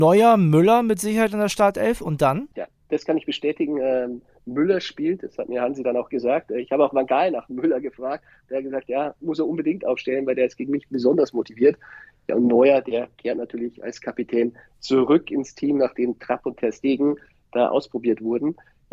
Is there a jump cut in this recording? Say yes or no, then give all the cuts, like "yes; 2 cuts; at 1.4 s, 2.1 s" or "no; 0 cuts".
no; 0 cuts